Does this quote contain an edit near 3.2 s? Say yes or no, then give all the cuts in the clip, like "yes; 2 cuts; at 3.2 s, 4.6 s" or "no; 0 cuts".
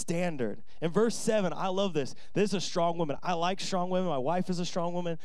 no; 0 cuts